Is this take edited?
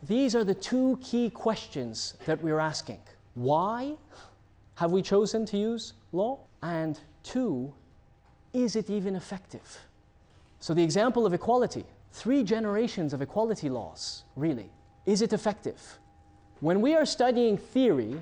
yes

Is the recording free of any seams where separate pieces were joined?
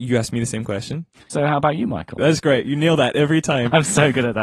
no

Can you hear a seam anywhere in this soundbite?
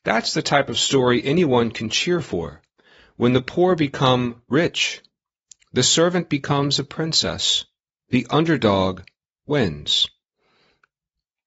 no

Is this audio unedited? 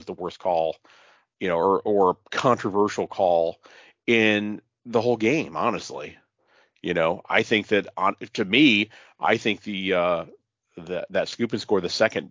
yes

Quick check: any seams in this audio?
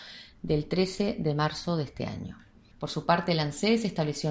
yes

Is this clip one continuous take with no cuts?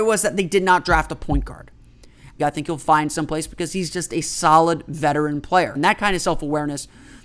no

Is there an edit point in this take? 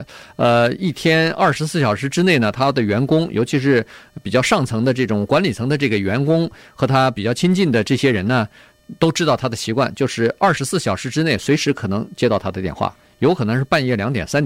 no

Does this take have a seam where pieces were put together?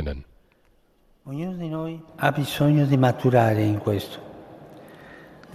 yes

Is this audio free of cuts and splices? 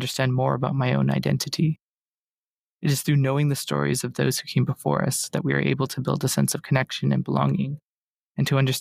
yes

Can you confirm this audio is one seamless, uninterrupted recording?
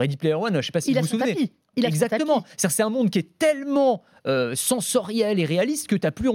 yes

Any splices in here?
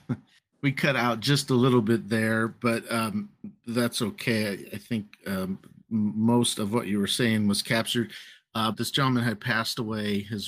yes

